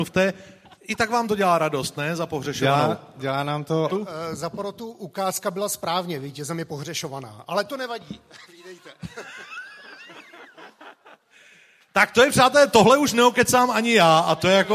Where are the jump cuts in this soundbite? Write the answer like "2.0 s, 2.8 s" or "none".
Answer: 3.9 s